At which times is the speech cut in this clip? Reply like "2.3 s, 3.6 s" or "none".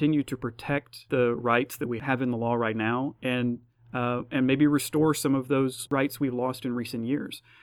none